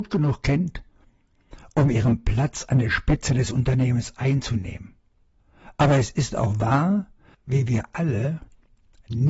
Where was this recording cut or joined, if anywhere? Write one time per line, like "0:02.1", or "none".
0:07.3